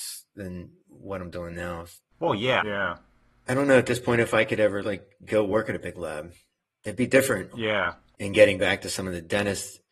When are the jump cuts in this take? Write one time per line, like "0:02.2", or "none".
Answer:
0:02.6
0:07.5